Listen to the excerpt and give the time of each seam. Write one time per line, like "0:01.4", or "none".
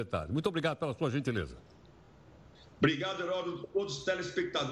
none